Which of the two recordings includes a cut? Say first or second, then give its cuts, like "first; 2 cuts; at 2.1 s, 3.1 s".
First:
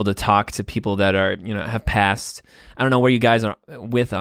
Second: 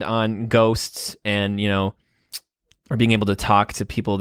second; 1 cut; at 2.8 s